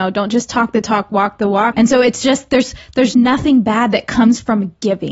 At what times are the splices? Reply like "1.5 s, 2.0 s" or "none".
1.7 s, 3.1 s